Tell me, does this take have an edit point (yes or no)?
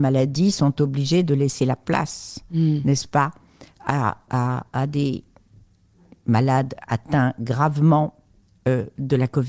no